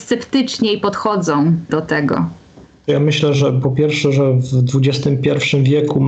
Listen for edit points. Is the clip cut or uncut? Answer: uncut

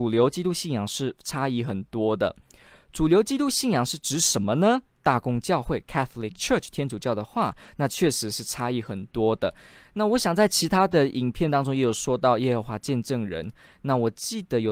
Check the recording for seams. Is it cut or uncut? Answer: cut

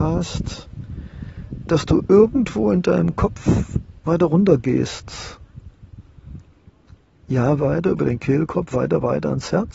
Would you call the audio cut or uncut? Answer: cut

